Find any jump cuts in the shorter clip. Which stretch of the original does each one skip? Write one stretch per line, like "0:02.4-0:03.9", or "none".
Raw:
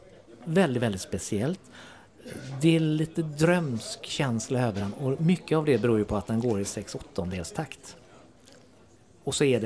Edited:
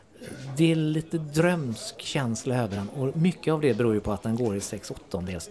none